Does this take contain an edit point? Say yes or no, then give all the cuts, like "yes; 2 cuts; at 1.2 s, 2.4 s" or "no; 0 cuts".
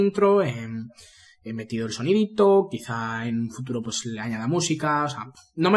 no; 0 cuts